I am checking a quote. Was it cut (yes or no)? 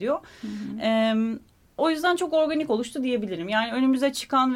no